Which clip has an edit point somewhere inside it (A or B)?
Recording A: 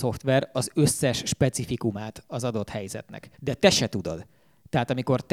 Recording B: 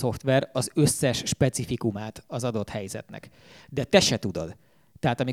A